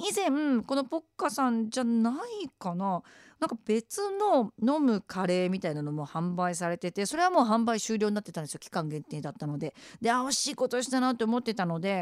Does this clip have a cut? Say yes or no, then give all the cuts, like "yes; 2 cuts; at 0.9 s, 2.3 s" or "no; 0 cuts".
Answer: no; 0 cuts